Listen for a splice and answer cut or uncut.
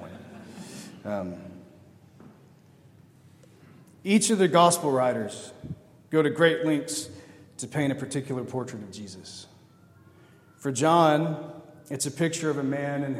uncut